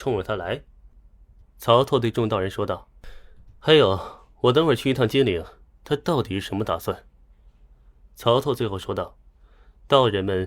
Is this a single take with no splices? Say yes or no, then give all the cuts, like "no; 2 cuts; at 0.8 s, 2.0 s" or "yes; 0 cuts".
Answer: no; 2 cuts; at 1.4 s, 5.7 s